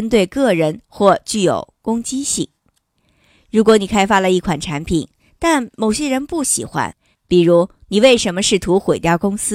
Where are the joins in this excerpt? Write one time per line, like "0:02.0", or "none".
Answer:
0:07.1